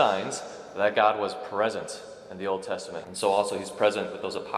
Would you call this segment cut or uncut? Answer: cut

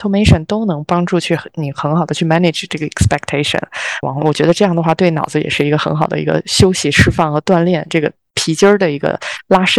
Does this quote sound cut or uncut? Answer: cut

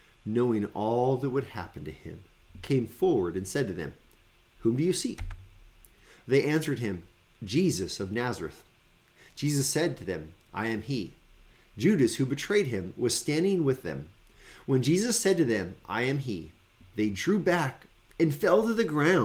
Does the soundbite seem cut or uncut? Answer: uncut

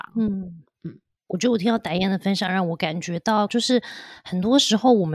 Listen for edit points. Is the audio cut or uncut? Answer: cut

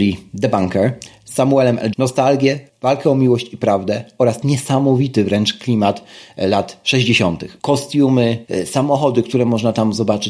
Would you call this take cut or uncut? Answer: cut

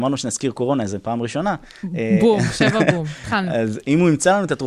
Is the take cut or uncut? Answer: uncut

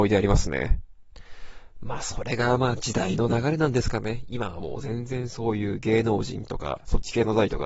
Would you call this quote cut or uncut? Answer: uncut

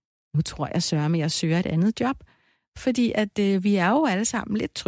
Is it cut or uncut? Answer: uncut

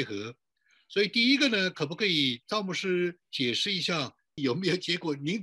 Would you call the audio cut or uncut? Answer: cut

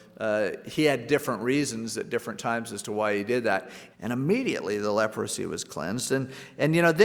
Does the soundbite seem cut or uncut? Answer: cut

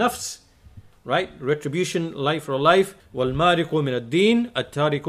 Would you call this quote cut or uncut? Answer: cut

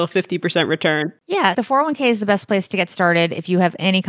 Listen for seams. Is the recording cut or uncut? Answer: uncut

